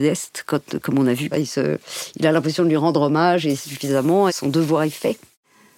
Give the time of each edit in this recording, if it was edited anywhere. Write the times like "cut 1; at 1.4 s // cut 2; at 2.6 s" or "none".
cut 1; at 1.3 s // cut 2; at 4.3 s